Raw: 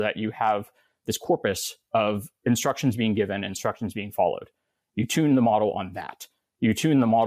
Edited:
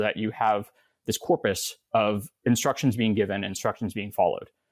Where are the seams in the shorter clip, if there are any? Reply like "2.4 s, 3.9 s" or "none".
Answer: none